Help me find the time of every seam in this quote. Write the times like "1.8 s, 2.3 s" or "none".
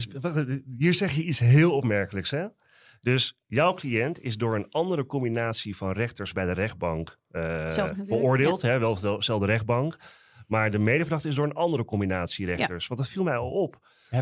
7.9 s